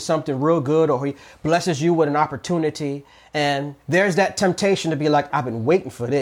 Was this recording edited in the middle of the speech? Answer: yes; 1 cut; at 5.3 s

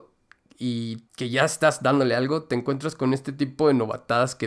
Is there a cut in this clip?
yes; 1 cut; at 1.1 s

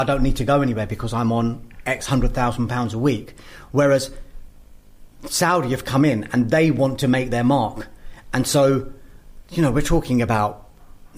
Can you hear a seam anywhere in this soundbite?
no; 0 cuts

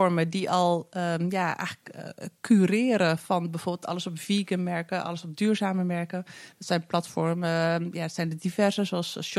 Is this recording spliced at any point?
no; 0 cuts

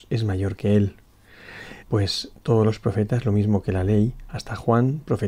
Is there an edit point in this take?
yes; 1 cut; at 1.8 s

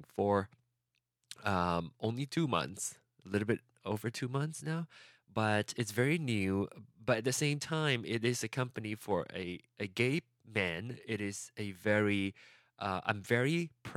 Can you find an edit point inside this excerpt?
no; 0 cuts

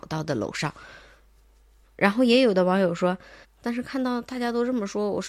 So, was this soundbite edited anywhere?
yes; 2 cuts; at 1.8 s, 3.4 s

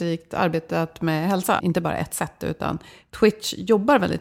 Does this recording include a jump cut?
yes; 1 cut; at 1.6 s

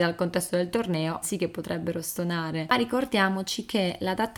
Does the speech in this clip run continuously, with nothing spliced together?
no; 2 cuts; at 1.2 s, 2.7 s

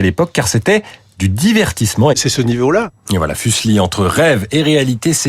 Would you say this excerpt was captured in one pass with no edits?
no; 1 cut; at 2.1 s

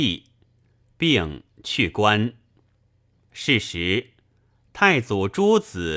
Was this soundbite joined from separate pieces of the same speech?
no; 0 cuts

